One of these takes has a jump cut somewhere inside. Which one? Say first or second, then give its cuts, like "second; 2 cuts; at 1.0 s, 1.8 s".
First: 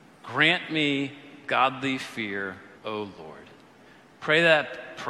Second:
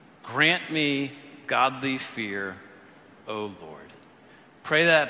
first; 1 cut; at 2.8 s